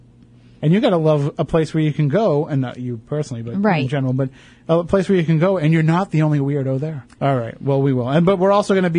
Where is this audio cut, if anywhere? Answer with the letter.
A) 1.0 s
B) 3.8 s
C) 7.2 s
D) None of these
C